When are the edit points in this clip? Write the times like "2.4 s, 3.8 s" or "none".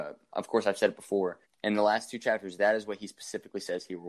1.4 s

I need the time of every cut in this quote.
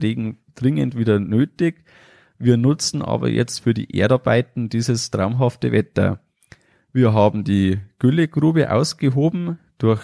none

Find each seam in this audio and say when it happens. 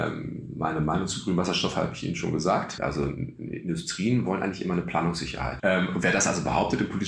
2.8 s, 5.6 s

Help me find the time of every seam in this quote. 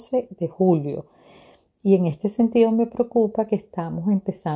none

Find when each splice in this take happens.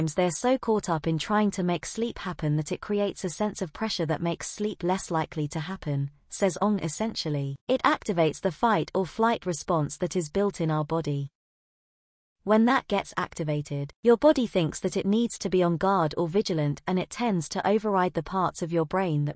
none

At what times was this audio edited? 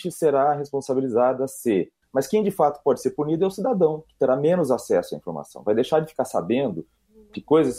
2.0 s

